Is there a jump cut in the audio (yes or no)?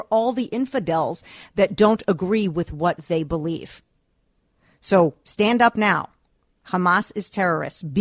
no